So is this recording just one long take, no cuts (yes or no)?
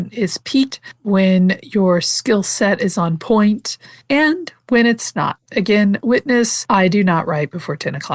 no